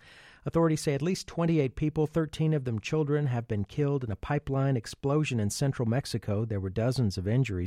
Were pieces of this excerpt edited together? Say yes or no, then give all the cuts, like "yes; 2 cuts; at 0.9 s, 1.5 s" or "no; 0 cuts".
no; 0 cuts